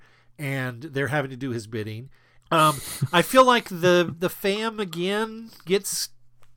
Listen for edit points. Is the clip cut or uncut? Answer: cut